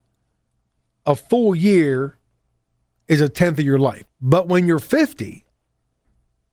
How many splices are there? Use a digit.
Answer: 1